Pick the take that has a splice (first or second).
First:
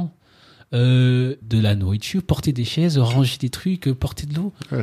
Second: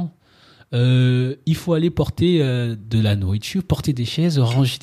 first